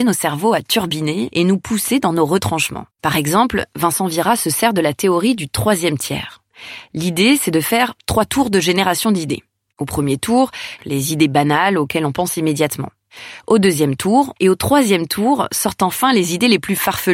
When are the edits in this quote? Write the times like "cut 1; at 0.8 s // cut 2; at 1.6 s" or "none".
cut 1; at 2.9 s // cut 2; at 10.8 s // cut 3; at 14.4 s